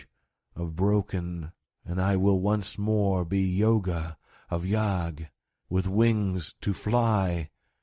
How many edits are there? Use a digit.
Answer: 2